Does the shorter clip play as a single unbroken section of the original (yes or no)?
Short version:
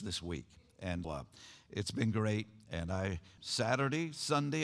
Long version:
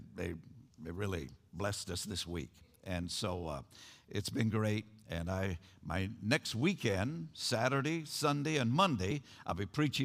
no